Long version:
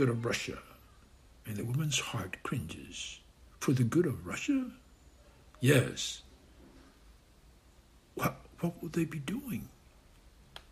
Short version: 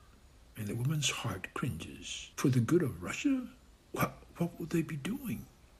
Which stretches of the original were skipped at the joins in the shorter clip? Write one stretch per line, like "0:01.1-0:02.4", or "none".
0:03.2-0:03.6
0:05.0-0:07.9